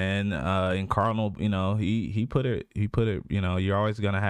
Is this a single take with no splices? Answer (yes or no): yes